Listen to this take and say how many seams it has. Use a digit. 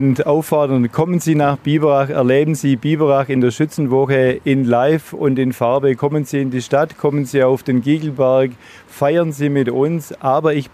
0